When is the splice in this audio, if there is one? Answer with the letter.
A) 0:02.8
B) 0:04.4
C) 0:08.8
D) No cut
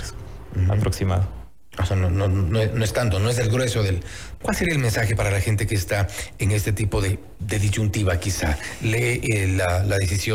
B